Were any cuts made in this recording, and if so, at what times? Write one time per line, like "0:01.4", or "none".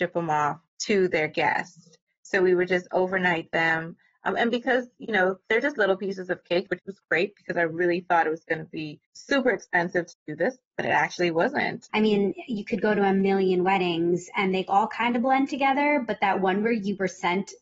0:06.7
0:11.9

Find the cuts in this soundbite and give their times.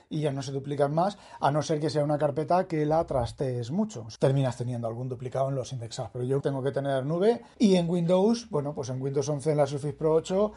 0:04.2
0:06.4
0:07.5

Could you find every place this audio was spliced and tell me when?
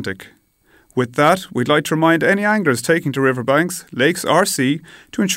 none

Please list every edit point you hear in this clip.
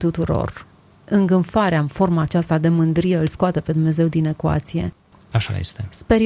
0:05.1

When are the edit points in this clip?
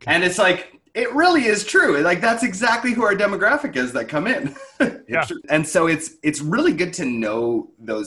0:05.4

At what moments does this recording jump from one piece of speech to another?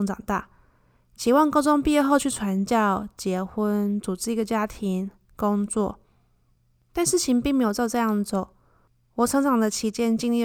none

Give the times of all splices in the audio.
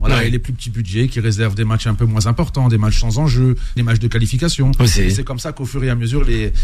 0:03.8

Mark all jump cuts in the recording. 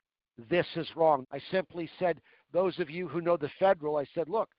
0:01.2

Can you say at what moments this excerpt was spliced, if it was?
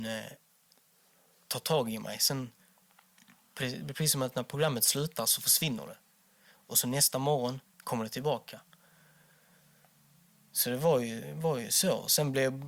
0:07.7

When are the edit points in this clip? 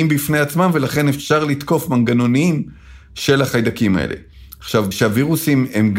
0:04.9

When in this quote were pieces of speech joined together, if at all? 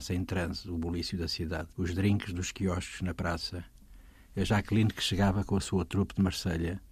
0:01.7

